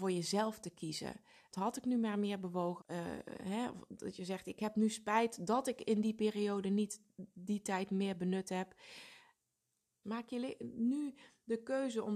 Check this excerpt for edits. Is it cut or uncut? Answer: cut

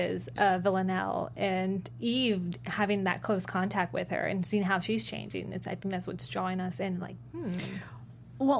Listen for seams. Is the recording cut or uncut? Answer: uncut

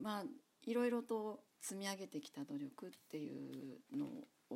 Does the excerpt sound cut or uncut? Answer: cut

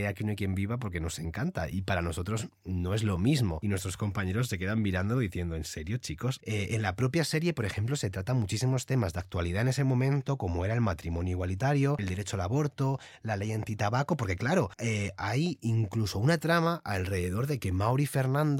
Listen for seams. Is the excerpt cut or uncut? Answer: cut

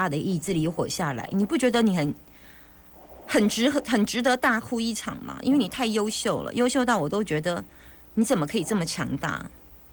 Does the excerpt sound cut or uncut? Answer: uncut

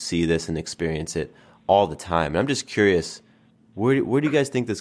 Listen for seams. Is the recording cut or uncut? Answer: uncut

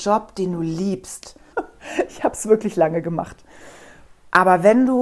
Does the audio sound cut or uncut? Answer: cut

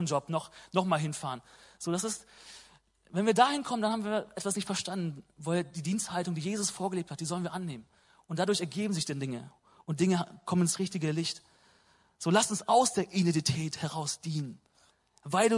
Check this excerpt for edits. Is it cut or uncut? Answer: uncut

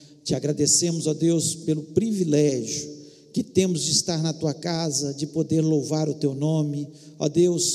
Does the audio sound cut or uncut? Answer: uncut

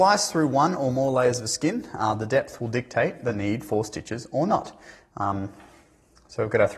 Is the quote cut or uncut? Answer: uncut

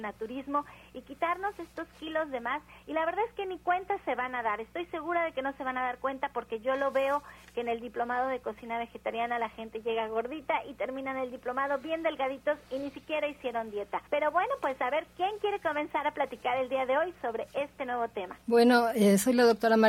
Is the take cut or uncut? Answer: cut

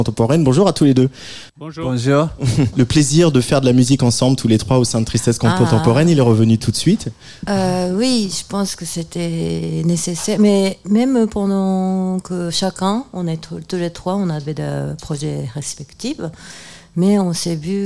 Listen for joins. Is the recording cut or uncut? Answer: cut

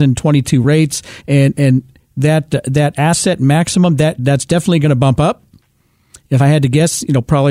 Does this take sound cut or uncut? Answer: uncut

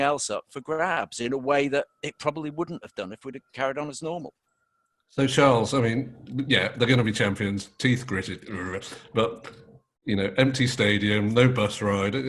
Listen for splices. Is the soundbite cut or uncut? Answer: uncut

